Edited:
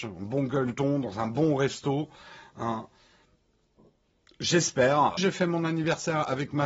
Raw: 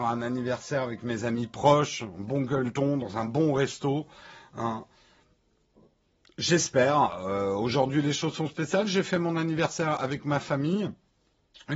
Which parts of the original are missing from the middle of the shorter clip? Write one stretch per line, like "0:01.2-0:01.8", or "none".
0:07.2-0:08.9